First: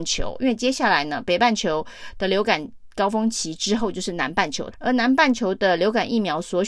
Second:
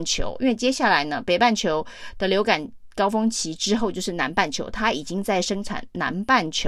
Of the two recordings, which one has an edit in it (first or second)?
first